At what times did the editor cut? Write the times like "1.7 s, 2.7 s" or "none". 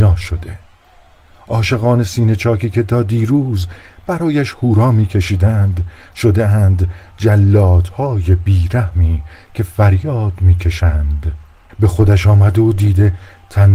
11.7 s